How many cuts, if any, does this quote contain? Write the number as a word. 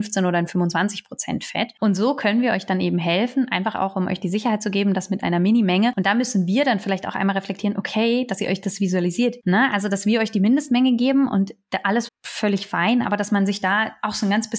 three